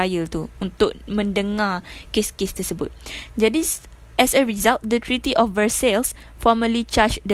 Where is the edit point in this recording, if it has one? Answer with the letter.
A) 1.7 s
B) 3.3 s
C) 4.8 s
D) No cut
D